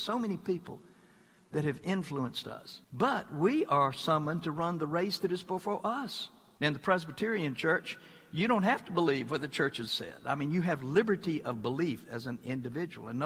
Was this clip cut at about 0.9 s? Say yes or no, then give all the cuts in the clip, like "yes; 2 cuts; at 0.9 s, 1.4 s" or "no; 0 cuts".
no; 3 cuts; at 2.8 s, 6.6 s, 9.9 s